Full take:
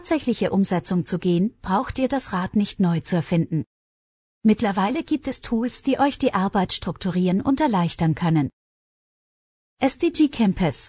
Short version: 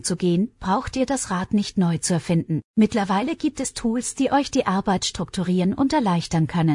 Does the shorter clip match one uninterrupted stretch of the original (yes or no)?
no